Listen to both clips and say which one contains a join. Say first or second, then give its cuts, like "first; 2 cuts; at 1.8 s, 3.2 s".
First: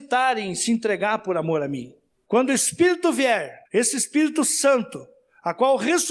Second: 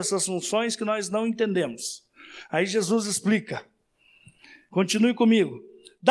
first; 2 cuts; at 2.1 s, 3.7 s